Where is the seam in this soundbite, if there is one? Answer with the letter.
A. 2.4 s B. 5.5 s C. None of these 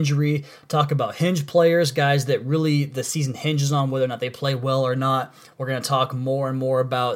C